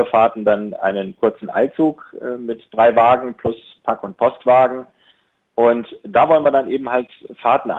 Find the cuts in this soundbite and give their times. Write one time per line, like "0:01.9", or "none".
none